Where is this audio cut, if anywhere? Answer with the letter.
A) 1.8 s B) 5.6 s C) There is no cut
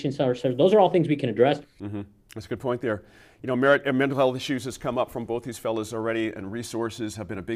A